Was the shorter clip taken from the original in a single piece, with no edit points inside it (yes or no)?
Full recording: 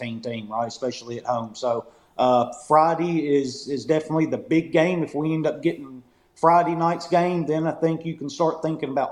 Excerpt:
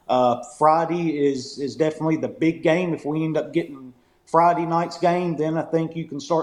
yes